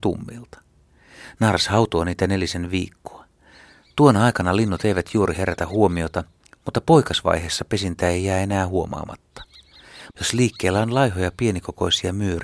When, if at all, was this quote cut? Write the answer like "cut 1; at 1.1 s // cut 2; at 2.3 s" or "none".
cut 1; at 10.1 s